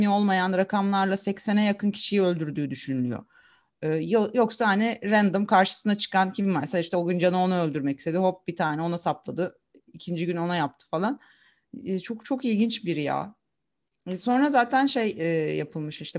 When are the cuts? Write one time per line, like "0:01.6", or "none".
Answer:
none